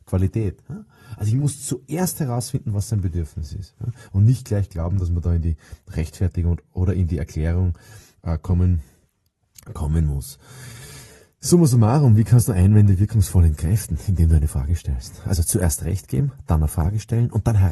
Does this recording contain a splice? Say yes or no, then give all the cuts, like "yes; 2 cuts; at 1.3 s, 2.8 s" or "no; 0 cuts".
no; 0 cuts